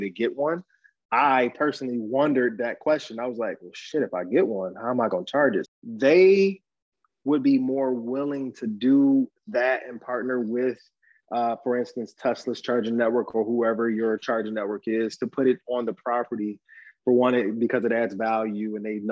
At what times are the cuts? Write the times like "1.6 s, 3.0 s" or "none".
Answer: 5.6 s